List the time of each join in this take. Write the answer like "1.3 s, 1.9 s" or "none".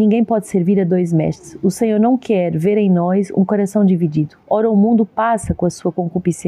4.4 s